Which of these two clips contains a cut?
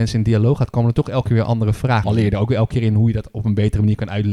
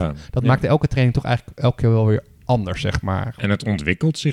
first; 1 cut; at 2.0 s

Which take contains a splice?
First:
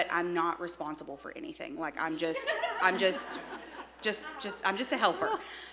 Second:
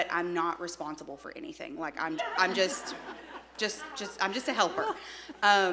second; 1 cut; at 2.2 s

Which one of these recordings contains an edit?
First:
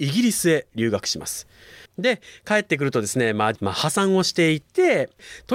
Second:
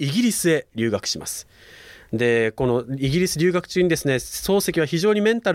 first; 2 cuts; at 1.8 s, 3.6 s

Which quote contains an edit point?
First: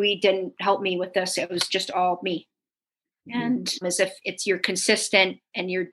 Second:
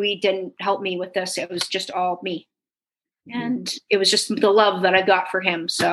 first; 1 cut; at 3.8 s

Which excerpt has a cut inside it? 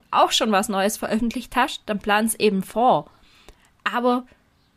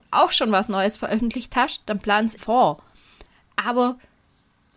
second; 1 cut; at 2.4 s

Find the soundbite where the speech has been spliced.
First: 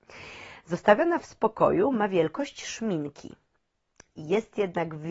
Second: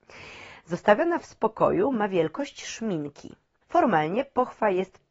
second; 1 cut; at 3.6 s

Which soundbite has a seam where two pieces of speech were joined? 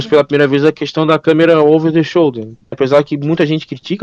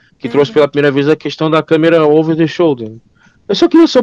first; 1 cut; at 2.7 s

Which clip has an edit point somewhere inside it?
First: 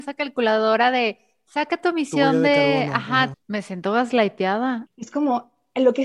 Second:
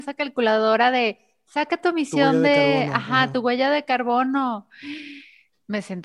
first; 2 cuts; at 3.3 s, 4.9 s

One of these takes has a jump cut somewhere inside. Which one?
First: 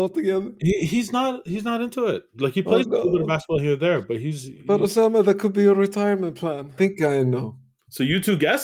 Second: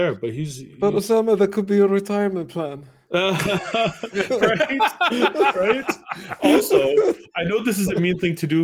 first; 1 cut; at 6.8 s

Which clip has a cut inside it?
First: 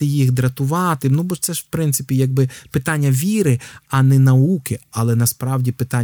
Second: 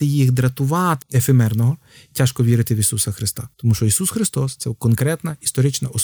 second; 2 cuts; at 1.0 s, 3.5 s

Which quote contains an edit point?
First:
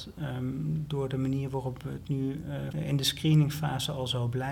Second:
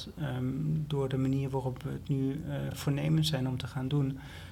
first; 1 cut; at 2.7 s

